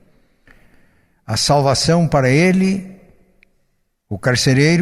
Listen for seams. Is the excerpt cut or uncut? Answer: uncut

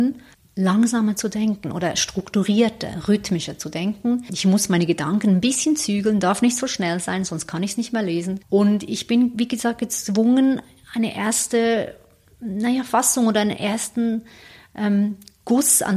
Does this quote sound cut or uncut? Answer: uncut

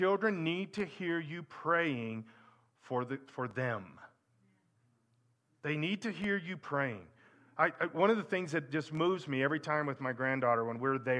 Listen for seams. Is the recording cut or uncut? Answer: uncut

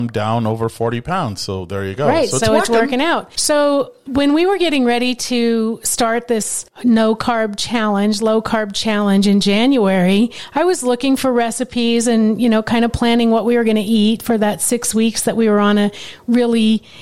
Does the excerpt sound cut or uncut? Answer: uncut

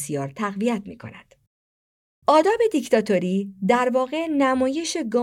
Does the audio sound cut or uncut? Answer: uncut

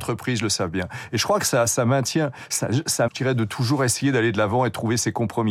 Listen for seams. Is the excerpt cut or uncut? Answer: cut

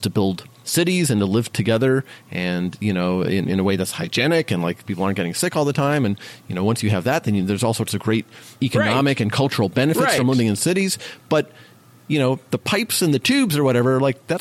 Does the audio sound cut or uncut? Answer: uncut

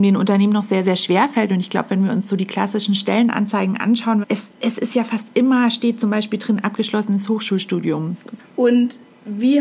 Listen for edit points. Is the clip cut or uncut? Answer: cut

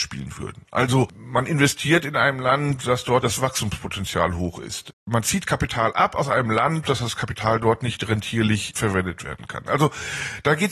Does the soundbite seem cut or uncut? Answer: cut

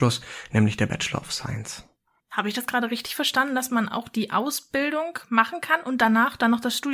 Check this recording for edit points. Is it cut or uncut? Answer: uncut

